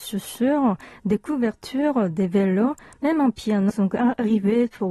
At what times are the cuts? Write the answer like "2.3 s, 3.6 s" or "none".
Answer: 3.7 s